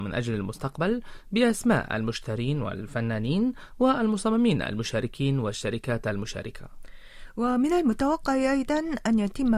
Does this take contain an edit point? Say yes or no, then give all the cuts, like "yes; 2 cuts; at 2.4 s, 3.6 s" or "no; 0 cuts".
no; 0 cuts